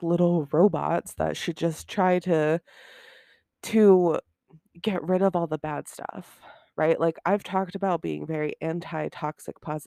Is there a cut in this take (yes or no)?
no